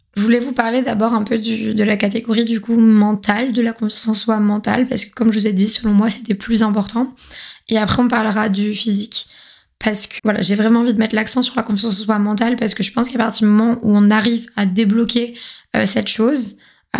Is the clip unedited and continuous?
no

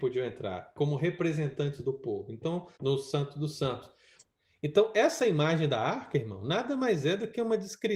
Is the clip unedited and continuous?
no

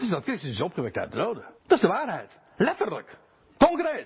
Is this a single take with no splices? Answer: no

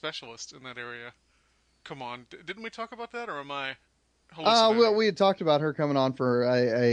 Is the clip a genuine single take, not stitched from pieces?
yes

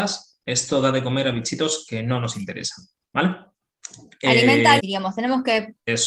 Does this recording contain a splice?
yes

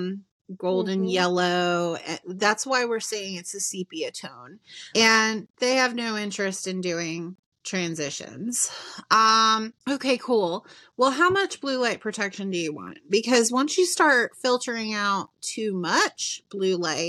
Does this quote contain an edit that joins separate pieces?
yes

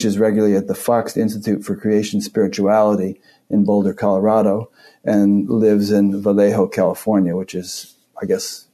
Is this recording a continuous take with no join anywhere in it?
yes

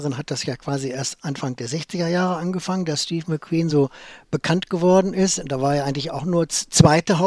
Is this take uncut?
yes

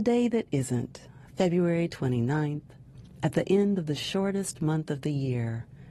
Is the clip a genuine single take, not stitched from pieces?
yes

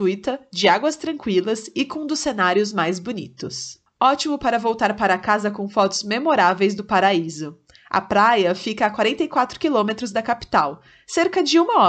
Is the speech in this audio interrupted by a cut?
no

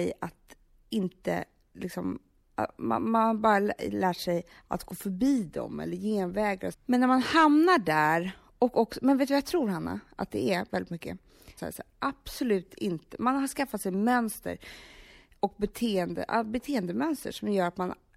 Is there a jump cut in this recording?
yes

